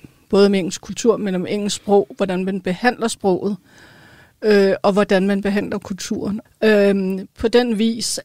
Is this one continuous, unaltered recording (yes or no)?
no